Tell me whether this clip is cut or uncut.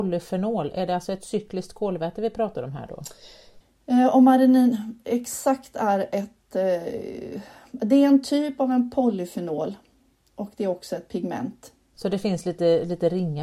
uncut